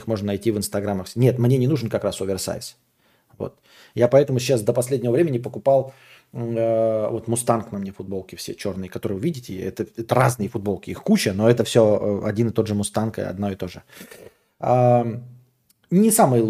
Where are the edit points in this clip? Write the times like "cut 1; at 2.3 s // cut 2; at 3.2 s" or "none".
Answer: none